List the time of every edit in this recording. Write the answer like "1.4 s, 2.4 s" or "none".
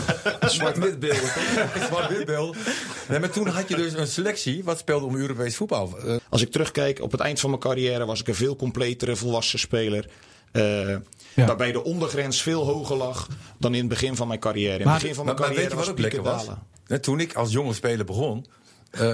6.2 s